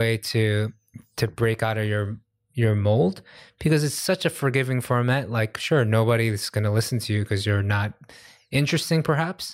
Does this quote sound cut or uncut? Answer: uncut